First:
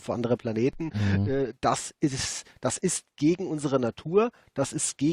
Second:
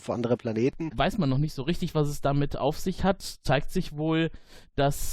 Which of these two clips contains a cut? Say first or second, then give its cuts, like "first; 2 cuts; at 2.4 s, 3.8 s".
second; 1 cut; at 0.9 s